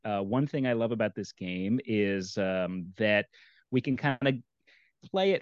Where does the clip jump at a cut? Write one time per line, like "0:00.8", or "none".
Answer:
none